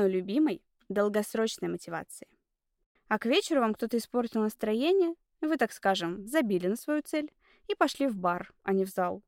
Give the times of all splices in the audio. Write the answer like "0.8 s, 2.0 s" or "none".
3.0 s

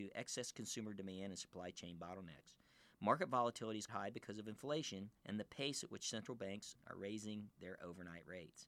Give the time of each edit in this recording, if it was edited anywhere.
3.9 s, 5.2 s

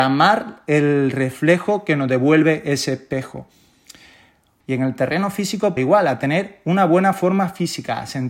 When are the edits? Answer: 4.6 s, 5.8 s

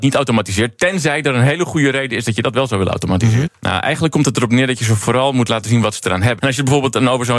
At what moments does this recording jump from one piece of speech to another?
3.5 s, 6.4 s

